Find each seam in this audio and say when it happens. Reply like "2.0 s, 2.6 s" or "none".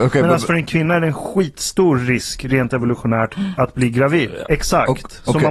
4.4 s